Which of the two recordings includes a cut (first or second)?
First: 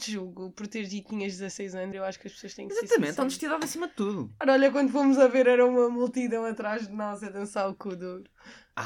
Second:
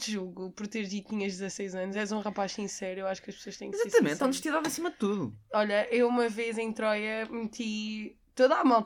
first